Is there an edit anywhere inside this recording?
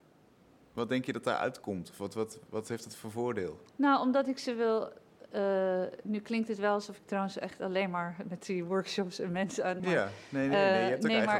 yes; 3 cuts; at 2.5 s, 3.7 s, 9.8 s

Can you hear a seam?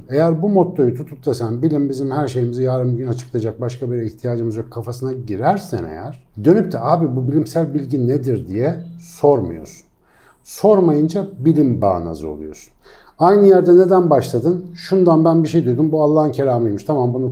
no; 0 cuts

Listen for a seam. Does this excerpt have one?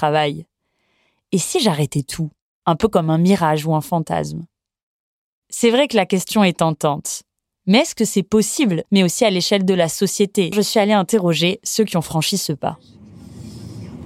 yes; 2 cuts; at 8.8 s, 10.5 s

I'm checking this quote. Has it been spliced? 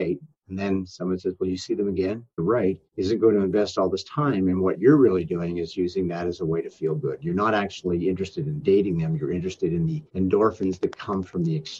yes; 1 cut; at 2.4 s

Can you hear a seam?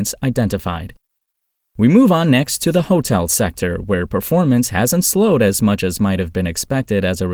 no; 0 cuts

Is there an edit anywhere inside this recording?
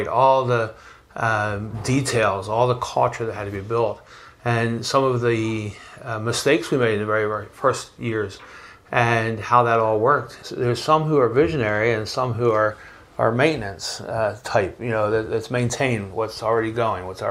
yes; 1 cut; at 10.4 s

